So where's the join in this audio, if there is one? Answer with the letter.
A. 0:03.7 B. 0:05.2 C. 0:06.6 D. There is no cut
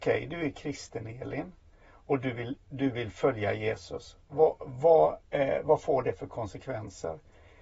B